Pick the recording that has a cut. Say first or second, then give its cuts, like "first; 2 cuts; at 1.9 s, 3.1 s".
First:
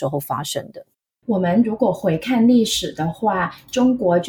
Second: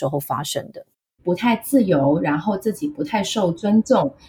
second; 1 cut; at 1.2 s